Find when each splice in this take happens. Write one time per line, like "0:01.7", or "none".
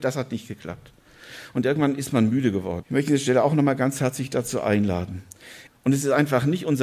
0:02.8
0:05.7